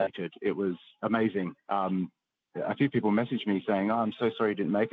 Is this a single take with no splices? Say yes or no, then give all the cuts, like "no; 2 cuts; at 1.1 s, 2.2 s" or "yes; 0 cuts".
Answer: yes; 0 cuts